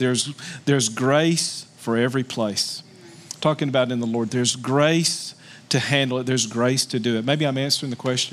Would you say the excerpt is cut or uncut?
uncut